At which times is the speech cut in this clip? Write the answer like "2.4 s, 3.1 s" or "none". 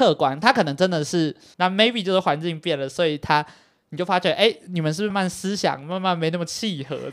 1.5 s, 5.1 s